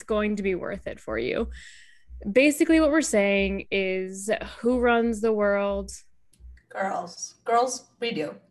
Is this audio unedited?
yes; 0 cuts

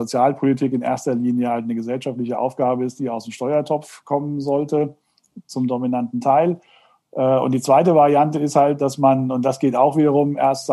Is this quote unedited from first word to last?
yes; 0 cuts

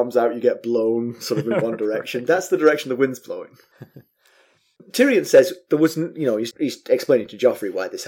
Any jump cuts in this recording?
yes; 2 cuts; at 4.8 s, 6.5 s

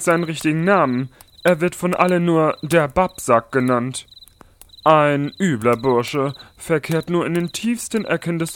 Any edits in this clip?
no; 0 cuts

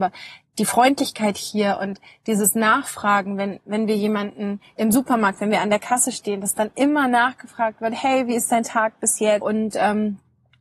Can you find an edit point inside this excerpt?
yes; 1 cut; at 9.4 s

